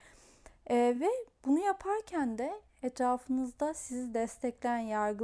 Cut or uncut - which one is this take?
uncut